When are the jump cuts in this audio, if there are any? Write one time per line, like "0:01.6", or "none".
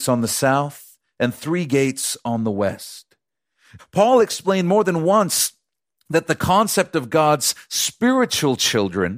0:03.8